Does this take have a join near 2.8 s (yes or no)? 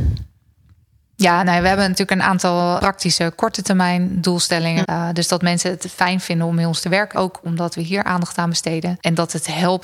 yes